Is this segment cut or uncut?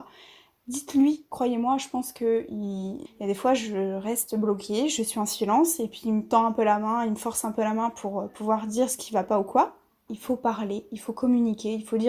cut